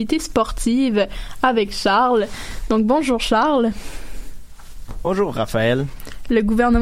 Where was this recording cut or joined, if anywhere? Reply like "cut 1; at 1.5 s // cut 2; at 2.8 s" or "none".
none